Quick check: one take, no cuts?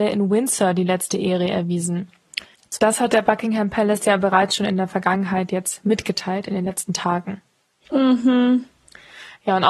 no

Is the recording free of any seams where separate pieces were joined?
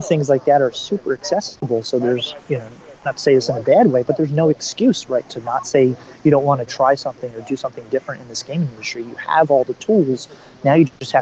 no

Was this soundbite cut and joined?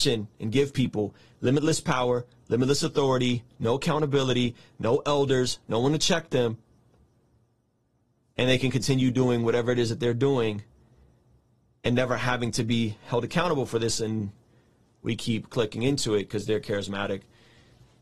no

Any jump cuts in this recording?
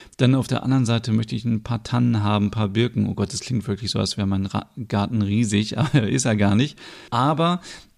yes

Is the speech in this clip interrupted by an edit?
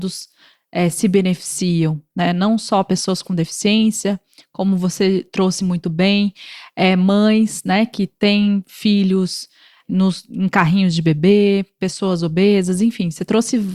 no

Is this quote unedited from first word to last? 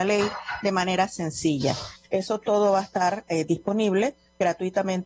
no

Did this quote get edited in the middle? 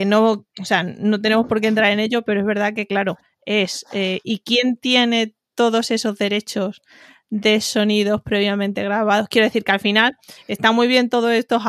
no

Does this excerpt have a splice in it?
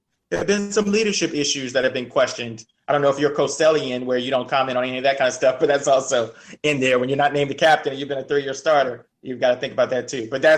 no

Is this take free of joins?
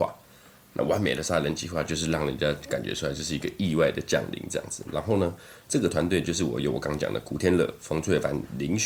yes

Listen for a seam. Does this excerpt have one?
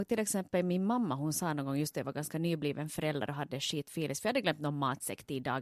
no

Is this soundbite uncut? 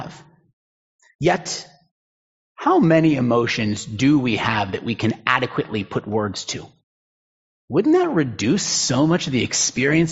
no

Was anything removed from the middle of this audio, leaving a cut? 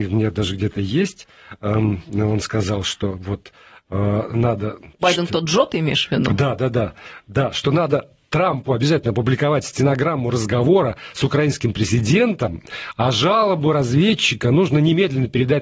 yes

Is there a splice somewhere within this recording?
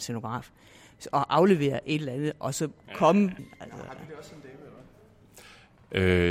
yes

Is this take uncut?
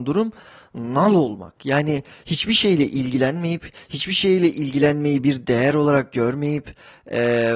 yes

